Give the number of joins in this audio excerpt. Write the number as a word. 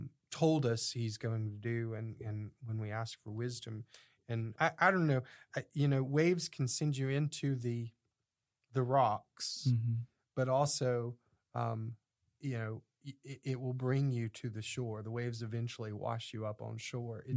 one